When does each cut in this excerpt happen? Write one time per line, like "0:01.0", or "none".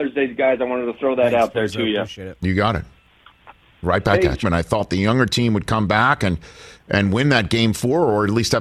0:04.4